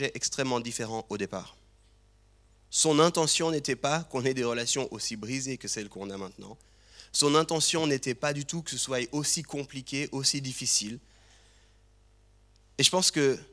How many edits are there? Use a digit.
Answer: 0